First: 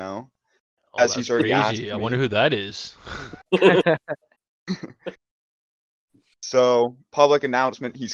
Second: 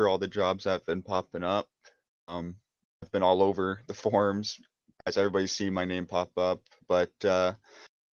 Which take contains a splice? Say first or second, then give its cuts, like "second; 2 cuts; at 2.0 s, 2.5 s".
first; 1 cut; at 5.1 s